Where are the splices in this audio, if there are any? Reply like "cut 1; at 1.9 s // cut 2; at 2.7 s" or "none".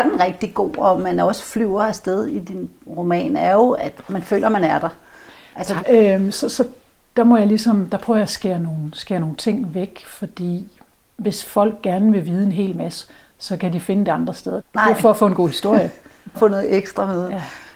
cut 1; at 5.8 s // cut 2; at 14.6 s // cut 3; at 16.3 s